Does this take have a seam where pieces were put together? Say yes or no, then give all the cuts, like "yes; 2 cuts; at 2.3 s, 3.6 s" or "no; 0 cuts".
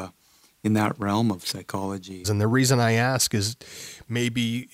yes; 1 cut; at 2.2 s